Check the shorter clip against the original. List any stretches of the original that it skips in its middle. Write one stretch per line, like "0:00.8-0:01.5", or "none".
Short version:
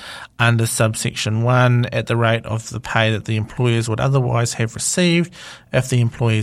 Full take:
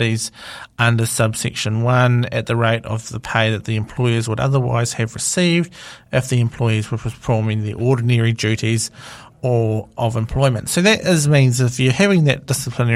none